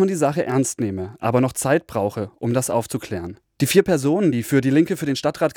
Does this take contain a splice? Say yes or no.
no